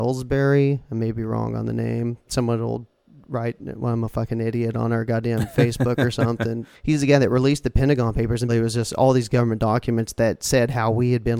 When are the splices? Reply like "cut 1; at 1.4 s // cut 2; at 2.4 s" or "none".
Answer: cut 1; at 6.7 s // cut 2; at 8.5 s

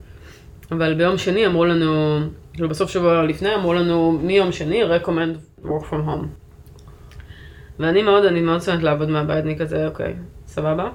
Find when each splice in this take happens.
none

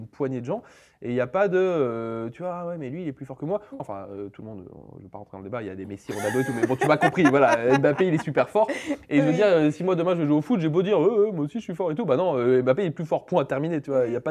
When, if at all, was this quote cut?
cut 1; at 3.8 s

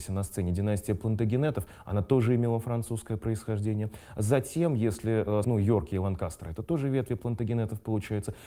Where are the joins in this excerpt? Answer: cut 1; at 5.4 s

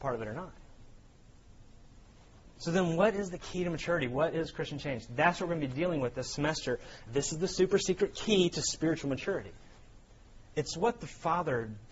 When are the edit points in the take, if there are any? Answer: cut 1; at 7.1 s // cut 2; at 10.4 s

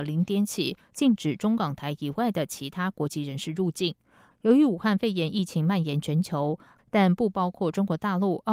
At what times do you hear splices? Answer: cut 1; at 4.3 s // cut 2; at 6.8 s

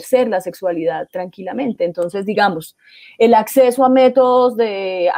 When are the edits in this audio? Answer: none

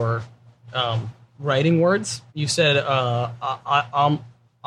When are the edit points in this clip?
cut 1; at 2.3 s

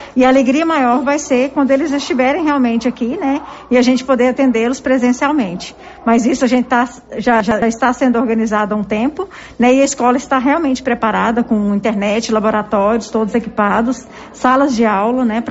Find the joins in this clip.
none

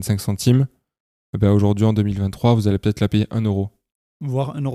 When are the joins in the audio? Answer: none

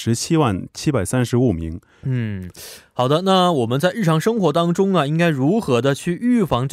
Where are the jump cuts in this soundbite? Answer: cut 1; at 2.0 s

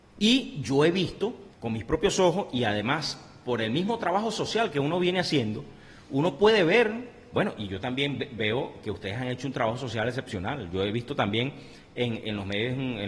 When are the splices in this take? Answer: cut 1; at 1.5 s

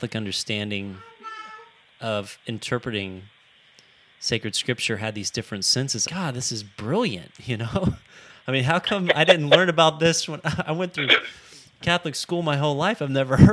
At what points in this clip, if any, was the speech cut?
cut 1; at 6.1 s

